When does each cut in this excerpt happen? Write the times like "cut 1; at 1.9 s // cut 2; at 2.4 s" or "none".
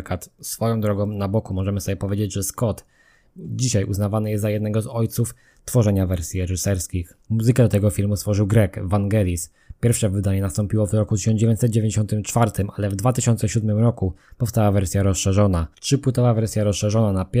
none